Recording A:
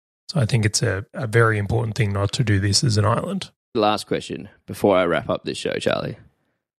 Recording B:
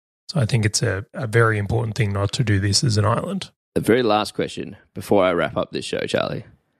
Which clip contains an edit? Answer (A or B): A